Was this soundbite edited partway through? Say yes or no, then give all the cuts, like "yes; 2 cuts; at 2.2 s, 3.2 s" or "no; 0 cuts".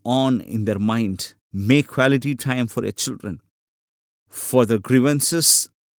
yes; 1 cut; at 1.4 s